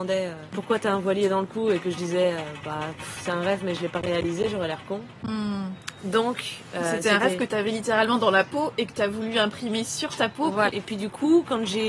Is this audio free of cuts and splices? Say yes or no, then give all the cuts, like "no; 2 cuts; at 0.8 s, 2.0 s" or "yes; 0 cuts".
no; 1 cut; at 10.7 s